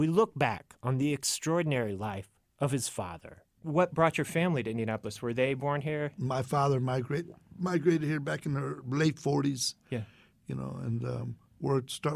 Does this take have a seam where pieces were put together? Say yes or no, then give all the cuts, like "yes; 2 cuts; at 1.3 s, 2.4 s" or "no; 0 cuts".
no; 0 cuts